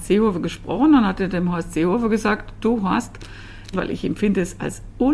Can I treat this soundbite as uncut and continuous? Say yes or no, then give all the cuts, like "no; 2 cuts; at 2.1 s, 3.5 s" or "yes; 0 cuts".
no; 1 cut; at 3.7 s